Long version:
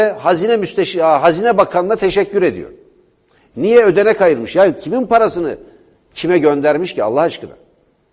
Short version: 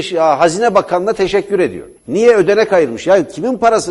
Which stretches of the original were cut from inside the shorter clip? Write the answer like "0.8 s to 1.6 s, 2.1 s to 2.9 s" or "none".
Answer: 2.8 s to 3.4 s